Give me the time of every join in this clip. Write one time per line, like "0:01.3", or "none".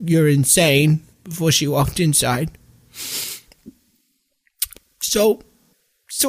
0:01.1